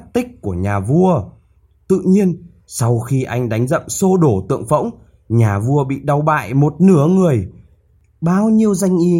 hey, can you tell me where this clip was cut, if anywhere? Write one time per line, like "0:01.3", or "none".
none